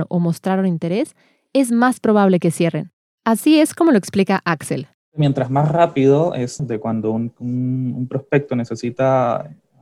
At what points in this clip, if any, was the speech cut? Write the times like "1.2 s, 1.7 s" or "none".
6.6 s